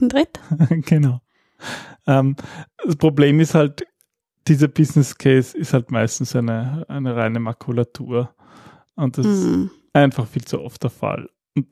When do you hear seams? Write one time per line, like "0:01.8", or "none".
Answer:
none